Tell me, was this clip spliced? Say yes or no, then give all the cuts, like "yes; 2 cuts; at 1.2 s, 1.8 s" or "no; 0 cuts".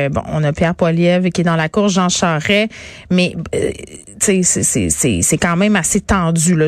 no; 0 cuts